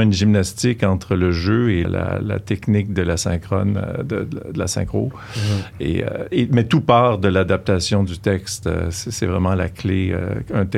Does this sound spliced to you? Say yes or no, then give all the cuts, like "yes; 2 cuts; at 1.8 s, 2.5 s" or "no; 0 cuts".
yes; 1 cut; at 1.8 s